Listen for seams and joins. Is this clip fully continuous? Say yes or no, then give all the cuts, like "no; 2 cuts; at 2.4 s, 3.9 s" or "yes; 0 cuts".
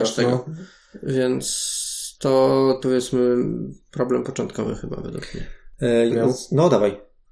no; 2 cuts; at 2.8 s, 6.1 s